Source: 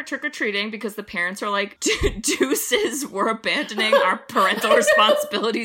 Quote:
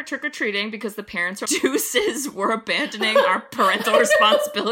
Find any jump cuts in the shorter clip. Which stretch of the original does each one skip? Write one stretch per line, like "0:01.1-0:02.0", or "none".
0:01.4-0:02.2